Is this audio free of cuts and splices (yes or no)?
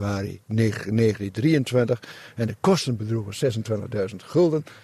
yes